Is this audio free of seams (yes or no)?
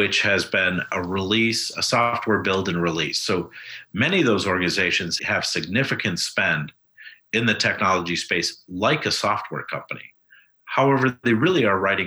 yes